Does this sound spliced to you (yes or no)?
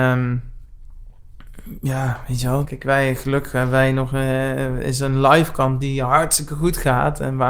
yes